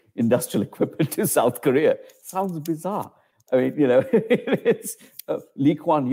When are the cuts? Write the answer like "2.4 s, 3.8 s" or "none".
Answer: none

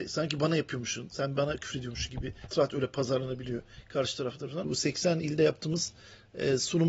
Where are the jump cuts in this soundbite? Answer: 2.5 s, 4.6 s

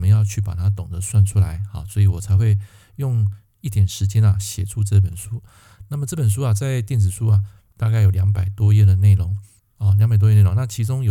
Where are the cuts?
none

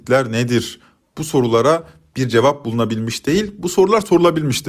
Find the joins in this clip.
none

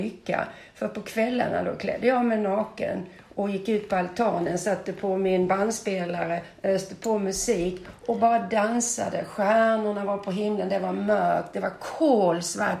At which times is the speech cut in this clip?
none

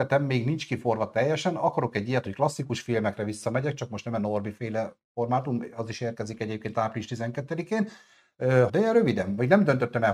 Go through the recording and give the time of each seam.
8.7 s

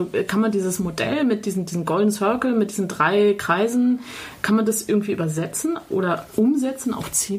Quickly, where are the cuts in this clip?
none

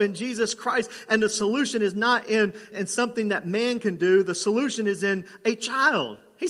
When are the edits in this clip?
2.7 s

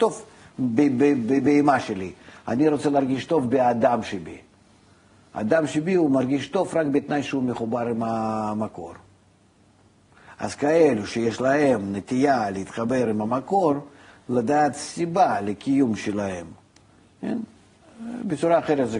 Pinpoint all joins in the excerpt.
none

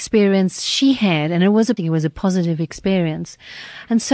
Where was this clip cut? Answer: 1.8 s

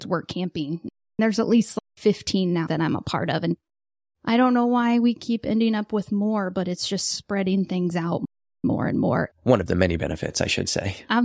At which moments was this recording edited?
2.7 s, 9.3 s

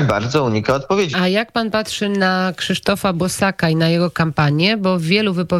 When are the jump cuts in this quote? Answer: 1.1 s

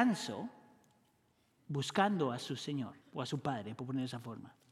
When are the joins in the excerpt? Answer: 1.6 s, 3.0 s

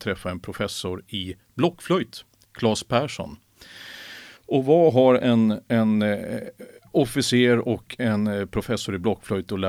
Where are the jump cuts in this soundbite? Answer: none

